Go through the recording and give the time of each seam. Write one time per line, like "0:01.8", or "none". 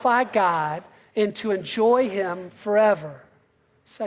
none